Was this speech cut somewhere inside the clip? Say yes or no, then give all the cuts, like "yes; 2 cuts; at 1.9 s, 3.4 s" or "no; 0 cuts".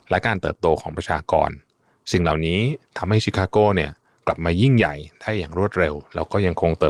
no; 0 cuts